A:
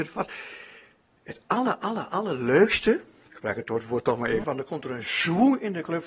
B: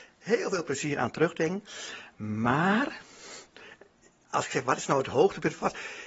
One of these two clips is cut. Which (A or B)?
A